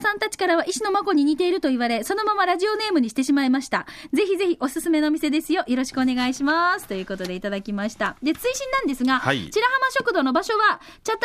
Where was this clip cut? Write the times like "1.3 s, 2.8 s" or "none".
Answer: 4.1 s